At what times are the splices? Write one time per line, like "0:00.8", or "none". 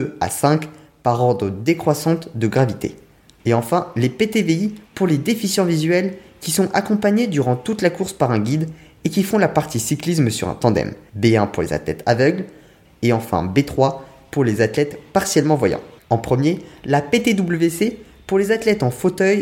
0:11.1
0:12.8
0:16.0

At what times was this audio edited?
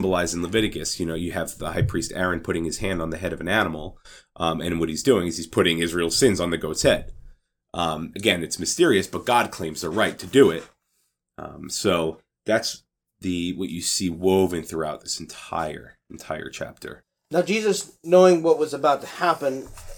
none

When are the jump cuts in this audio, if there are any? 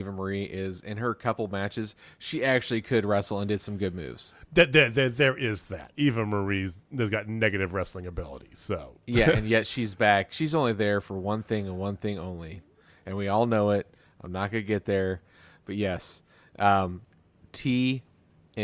none

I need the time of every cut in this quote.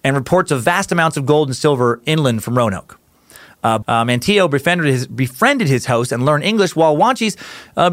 0:03.8

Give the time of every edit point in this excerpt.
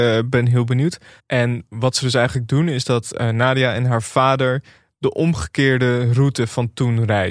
0:01.2

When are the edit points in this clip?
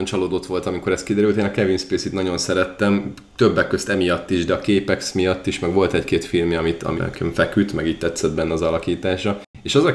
0:07.0

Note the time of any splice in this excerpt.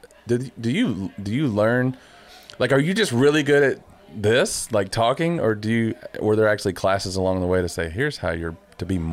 none

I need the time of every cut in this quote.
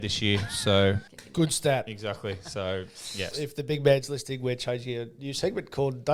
0:01.1
0:03.3

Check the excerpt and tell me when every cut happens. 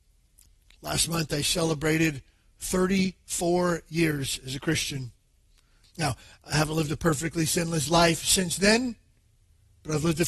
0:05.8

